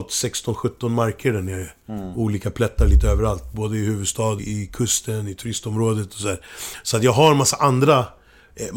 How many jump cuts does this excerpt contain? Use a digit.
1